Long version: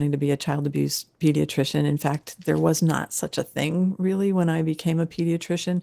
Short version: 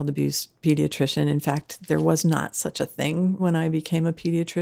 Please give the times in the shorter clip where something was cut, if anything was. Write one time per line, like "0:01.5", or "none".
0:03.4